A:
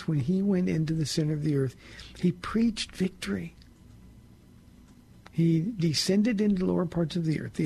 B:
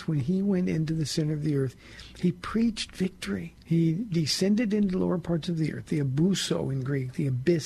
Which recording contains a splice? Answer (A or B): B